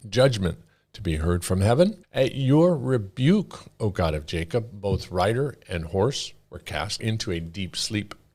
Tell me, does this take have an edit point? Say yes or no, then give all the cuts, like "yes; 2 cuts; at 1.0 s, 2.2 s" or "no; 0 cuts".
yes; 1 cut; at 2.0 s